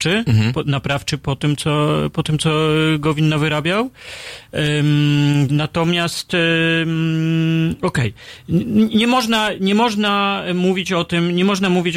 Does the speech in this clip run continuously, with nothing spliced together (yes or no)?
no